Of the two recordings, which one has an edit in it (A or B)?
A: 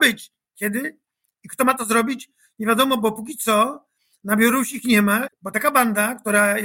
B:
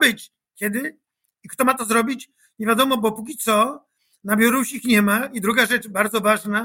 A